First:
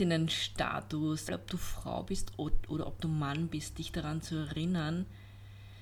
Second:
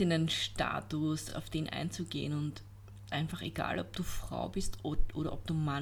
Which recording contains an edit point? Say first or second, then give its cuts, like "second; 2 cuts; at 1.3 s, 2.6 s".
first; 1 cut; at 1.3 s